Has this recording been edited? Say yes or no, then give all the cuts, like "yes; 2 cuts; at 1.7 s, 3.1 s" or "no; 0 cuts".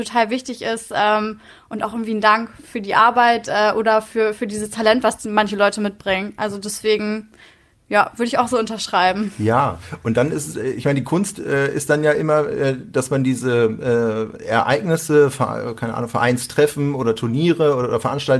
no; 0 cuts